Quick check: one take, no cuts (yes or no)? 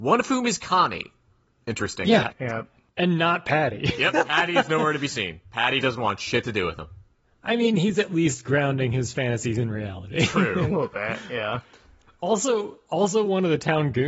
yes